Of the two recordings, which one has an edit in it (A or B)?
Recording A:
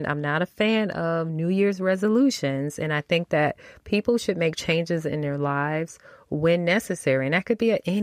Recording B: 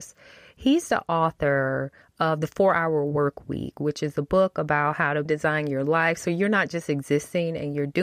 B